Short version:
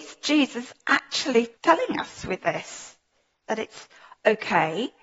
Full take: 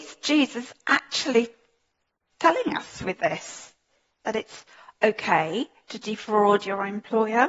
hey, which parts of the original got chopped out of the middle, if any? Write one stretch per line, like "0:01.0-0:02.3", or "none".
0:01.6-0:02.3

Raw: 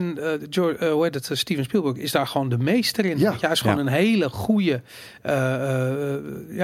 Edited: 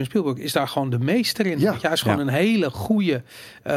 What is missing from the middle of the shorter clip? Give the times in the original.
none

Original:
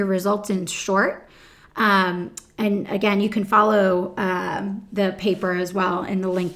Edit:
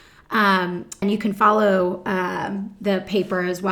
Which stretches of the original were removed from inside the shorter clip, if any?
0:02.5-0:03.1

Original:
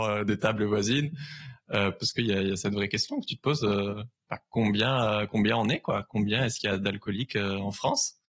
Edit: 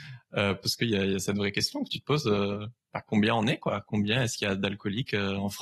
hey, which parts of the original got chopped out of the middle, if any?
0:04.4-0:05.3

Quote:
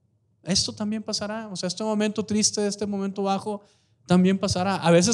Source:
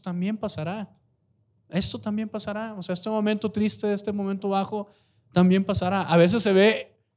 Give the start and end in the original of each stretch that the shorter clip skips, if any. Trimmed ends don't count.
none

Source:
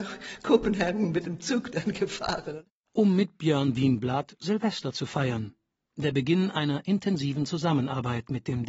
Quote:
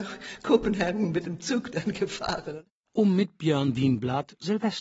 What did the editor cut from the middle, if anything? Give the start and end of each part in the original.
none

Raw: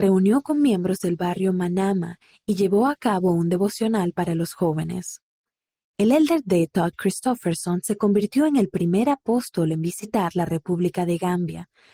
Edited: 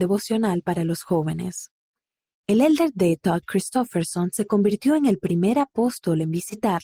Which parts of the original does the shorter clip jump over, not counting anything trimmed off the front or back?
none

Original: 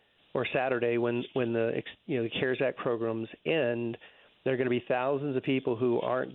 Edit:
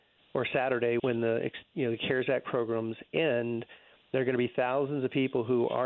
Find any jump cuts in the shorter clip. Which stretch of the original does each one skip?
0:01.0-0:01.3

